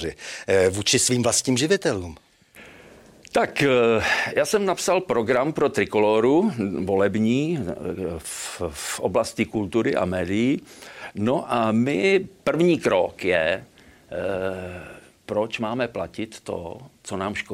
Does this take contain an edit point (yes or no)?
no